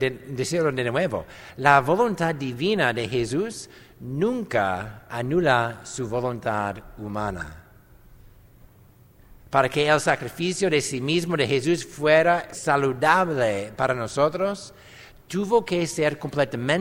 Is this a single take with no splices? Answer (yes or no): no